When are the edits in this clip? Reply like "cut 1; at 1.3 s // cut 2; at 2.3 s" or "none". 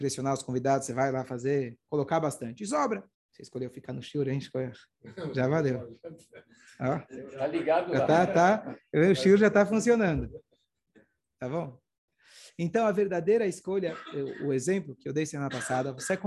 cut 1; at 3.1 s